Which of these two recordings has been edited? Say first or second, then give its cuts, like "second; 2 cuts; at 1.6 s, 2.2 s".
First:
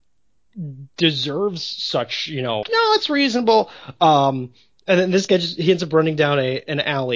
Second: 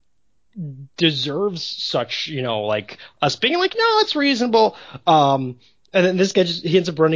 first; 1 cut; at 2.6 s